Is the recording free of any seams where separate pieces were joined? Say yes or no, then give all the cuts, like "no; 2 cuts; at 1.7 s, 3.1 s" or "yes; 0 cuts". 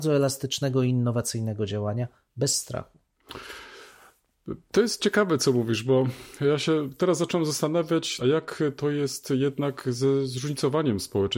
no; 1 cut; at 8.2 s